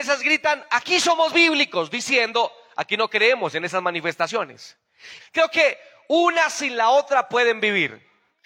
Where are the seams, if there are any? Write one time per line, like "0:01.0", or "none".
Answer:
0:05.2